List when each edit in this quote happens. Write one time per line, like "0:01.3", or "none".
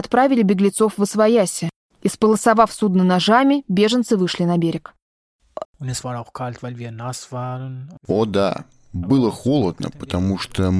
0:05.6